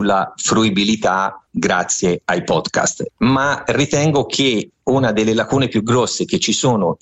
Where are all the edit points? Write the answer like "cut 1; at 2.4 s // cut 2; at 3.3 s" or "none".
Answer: cut 1; at 3.1 s